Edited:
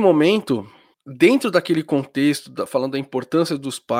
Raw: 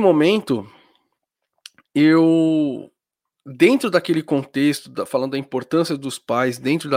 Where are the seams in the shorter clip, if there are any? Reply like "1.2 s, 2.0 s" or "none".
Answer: 0.9 s